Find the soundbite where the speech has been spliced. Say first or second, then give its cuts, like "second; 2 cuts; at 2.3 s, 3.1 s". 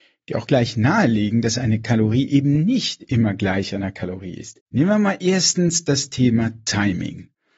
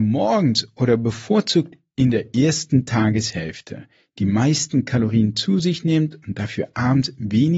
first; 1 cut; at 4.6 s